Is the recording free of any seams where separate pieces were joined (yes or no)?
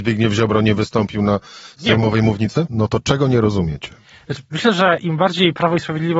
no